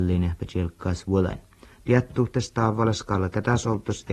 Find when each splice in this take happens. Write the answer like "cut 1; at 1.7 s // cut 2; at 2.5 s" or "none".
none

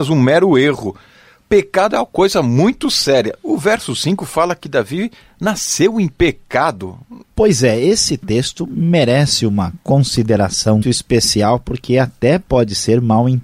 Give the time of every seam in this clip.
cut 1; at 7.3 s // cut 2; at 10.8 s

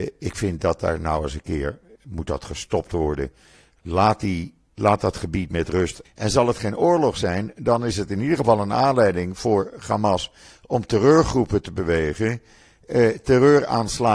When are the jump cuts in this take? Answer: cut 1; at 6.0 s

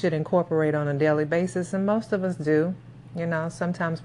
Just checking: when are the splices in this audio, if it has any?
none

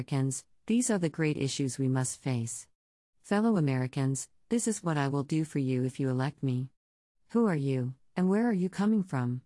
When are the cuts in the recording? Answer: cut 1; at 7.2 s

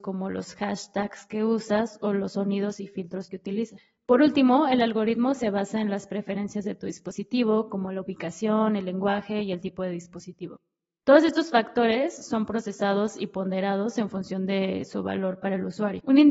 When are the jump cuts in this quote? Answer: none

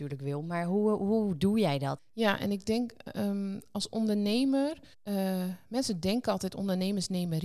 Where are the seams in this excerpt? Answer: cut 1; at 2.0 s // cut 2; at 4.9 s

